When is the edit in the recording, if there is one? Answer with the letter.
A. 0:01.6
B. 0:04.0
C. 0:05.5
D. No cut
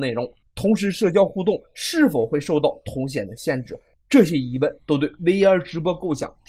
D